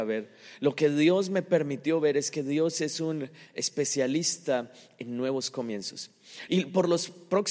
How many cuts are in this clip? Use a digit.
1